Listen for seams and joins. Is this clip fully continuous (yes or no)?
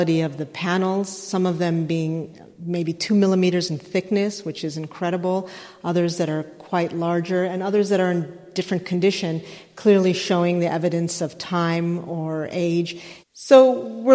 no